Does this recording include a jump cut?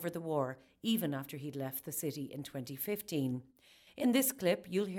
no; 0 cuts

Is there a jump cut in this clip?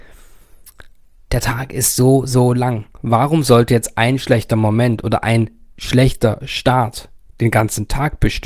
no; 0 cuts

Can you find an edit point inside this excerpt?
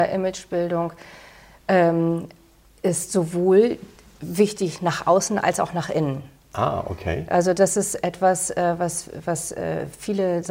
no; 0 cuts

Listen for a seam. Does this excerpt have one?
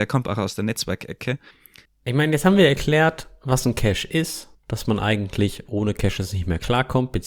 yes; 1 cut; at 1.8 s

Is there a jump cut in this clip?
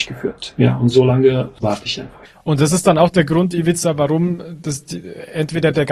no; 0 cuts

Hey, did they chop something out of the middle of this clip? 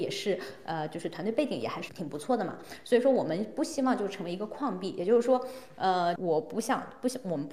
yes; 2 cuts; at 1.9 s, 6.2 s

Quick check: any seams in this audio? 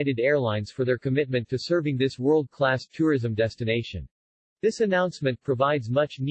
yes; 1 cut; at 4.5 s

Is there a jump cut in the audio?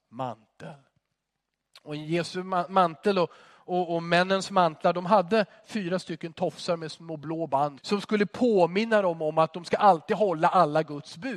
yes; 1 cut; at 7.8 s

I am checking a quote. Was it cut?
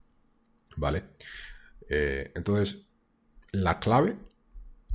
no; 0 cuts

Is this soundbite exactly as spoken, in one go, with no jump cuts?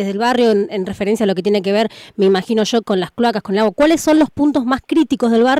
no; 1 cut; at 2.8 s

